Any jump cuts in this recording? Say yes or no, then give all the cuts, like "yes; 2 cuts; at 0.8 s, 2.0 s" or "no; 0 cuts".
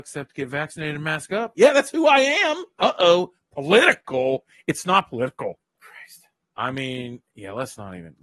yes; 2 cuts; at 2.8 s, 5.7 s